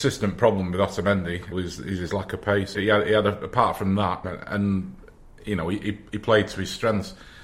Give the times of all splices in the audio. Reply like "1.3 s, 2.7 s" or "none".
1.5 s, 2.7 s, 4.2 s